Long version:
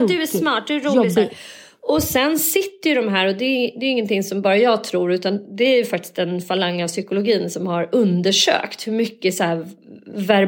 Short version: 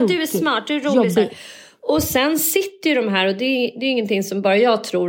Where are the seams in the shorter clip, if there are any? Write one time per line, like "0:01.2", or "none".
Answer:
none